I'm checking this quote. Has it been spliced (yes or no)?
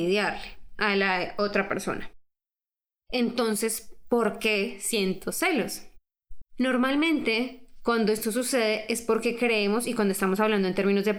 yes